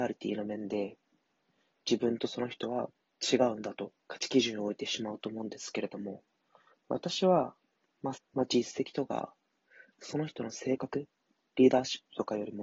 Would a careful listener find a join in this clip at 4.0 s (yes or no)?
yes